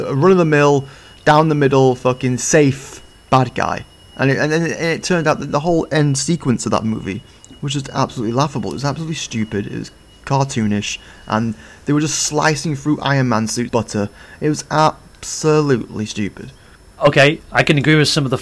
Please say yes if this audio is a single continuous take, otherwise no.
no